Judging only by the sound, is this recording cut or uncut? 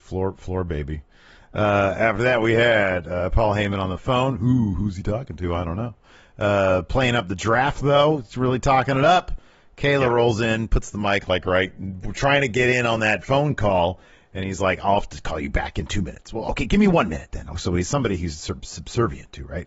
uncut